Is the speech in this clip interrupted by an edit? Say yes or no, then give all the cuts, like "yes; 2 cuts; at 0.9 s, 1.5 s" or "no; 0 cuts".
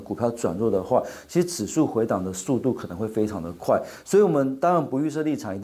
no; 0 cuts